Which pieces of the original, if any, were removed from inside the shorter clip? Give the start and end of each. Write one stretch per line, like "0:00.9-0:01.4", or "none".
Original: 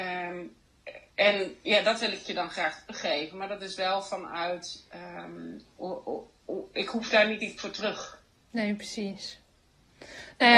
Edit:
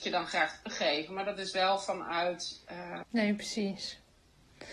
0:05.3-0:08.4